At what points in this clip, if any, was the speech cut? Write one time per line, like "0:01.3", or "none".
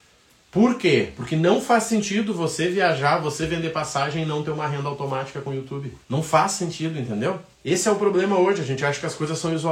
0:06.0
0:07.5